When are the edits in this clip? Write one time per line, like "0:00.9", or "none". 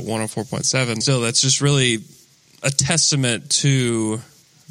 0:01.0